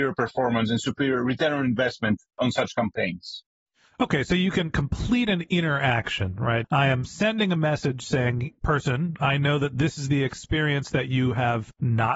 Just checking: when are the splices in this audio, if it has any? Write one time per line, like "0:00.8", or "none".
0:06.6
0:08.6

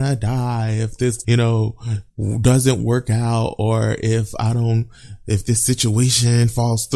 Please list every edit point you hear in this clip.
0:01.2

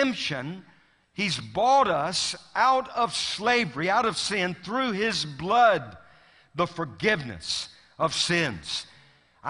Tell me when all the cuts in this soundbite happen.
none

